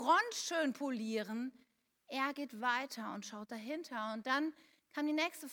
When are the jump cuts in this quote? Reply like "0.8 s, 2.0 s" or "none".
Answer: none